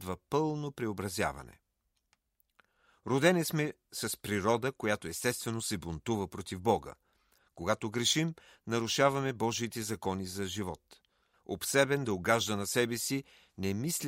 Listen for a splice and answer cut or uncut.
cut